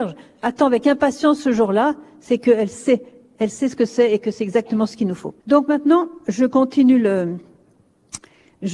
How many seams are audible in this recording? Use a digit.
1